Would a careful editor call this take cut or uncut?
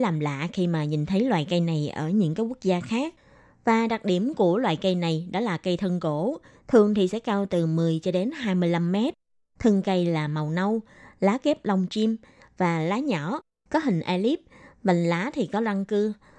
uncut